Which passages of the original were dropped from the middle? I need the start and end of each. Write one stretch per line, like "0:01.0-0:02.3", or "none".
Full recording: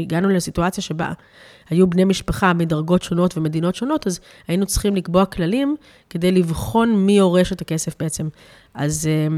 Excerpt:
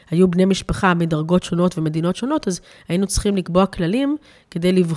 none